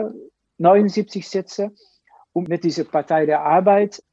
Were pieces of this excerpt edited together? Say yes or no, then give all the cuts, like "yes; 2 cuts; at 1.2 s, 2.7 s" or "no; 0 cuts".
no; 0 cuts